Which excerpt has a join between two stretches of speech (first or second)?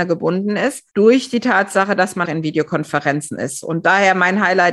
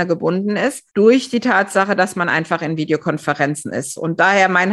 first